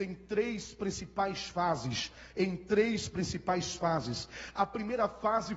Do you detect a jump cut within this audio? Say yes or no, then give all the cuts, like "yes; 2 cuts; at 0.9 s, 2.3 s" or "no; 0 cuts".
no; 0 cuts